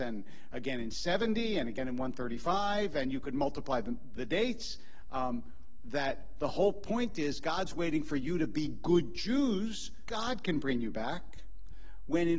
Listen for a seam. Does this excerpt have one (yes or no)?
yes